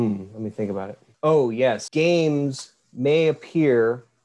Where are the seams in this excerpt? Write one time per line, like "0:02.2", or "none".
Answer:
0:01.9